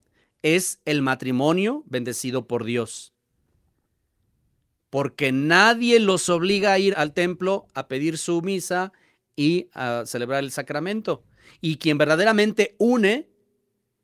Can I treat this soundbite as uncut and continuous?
no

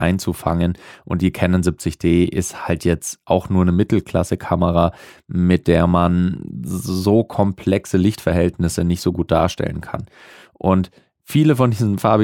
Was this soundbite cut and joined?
no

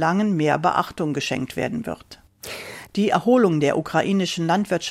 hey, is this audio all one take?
no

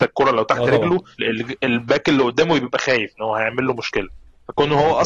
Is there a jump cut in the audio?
yes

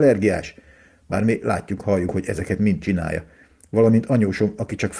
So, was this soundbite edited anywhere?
no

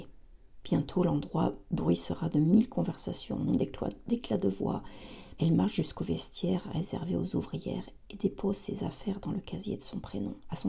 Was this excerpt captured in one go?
no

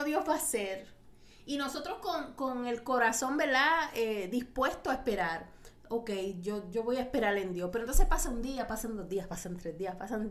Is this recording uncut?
yes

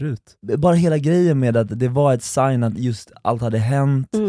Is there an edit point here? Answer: no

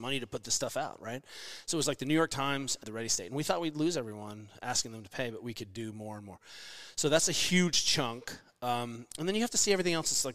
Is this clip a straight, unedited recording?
no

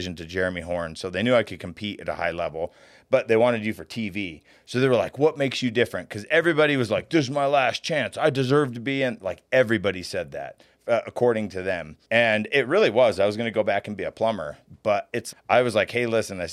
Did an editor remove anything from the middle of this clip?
yes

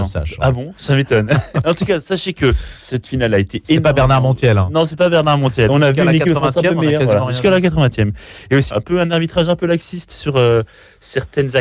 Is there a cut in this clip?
yes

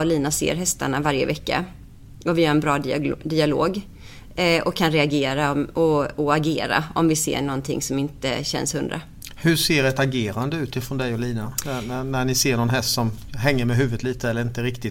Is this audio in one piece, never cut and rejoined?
yes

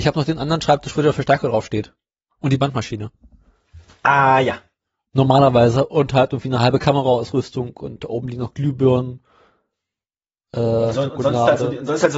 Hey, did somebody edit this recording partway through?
no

